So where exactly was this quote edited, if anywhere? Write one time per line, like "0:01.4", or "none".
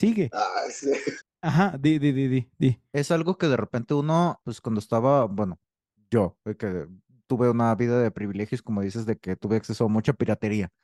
0:01.2
0:04.4